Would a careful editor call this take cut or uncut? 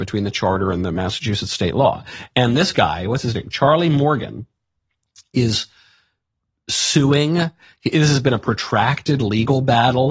cut